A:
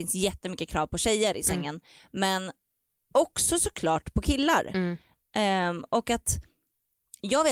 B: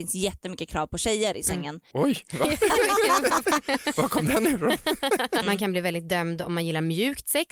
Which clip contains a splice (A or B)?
B